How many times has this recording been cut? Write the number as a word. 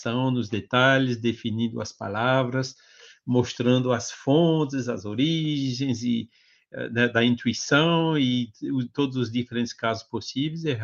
zero